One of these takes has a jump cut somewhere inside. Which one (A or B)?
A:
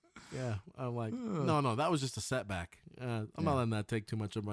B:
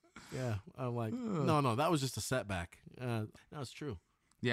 B